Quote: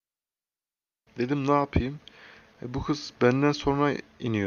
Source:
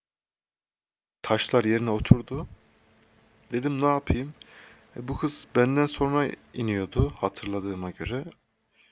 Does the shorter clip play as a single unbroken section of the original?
no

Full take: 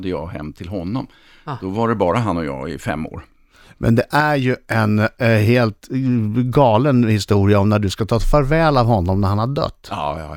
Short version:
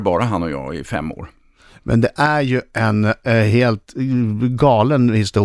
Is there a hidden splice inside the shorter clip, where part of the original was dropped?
no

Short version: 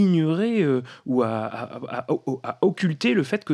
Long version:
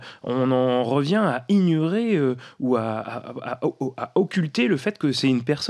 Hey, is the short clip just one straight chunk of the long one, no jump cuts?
yes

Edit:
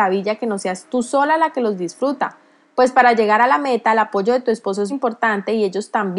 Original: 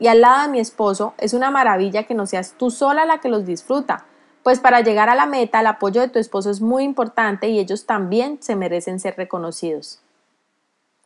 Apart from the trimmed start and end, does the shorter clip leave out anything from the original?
yes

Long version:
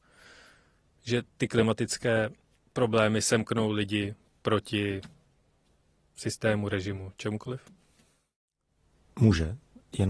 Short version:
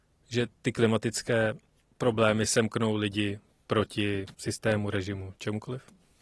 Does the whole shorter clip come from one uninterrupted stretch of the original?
no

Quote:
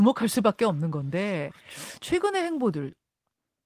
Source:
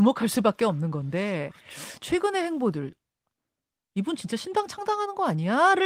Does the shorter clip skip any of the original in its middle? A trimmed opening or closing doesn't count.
no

